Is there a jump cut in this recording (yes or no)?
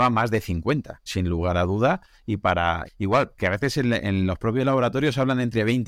yes